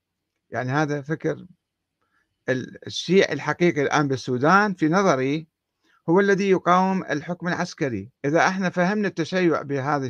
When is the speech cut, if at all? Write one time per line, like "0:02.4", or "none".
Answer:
0:08.2

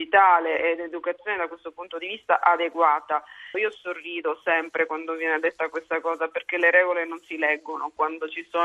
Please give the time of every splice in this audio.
0:03.5

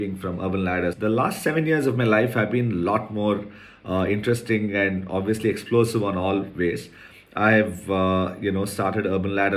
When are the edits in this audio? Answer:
0:00.9

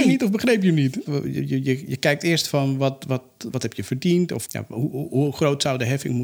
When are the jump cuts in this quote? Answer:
0:01.1
0:04.5

